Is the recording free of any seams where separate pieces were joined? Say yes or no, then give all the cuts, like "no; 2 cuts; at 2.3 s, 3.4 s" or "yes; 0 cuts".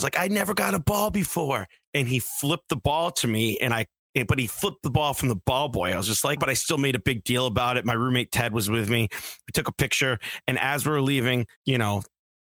no; 2 cuts; at 6.4 s, 11.6 s